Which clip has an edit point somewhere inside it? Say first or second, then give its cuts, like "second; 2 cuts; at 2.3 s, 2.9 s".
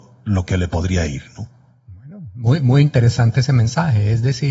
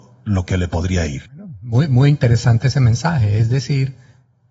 second; 1 cut; at 1.3 s